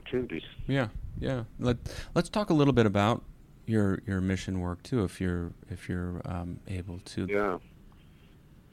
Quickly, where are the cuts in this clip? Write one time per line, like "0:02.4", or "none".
0:01.6
0:07.3